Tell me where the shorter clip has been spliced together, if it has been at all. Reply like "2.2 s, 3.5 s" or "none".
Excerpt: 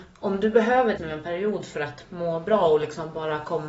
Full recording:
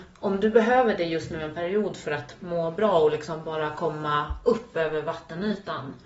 1.0 s